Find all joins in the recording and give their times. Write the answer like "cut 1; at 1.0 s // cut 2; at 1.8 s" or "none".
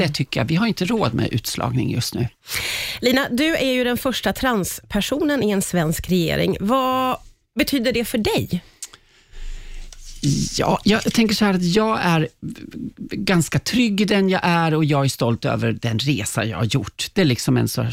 none